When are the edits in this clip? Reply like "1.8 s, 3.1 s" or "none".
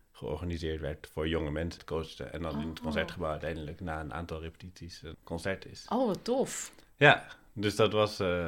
1.8 s, 5.1 s